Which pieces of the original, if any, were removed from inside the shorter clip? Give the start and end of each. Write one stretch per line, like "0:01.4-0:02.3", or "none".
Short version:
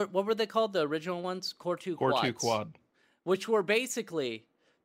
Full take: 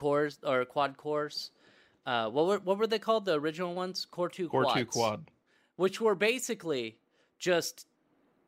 none